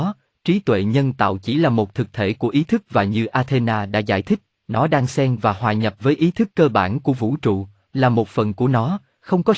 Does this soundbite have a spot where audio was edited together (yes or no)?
no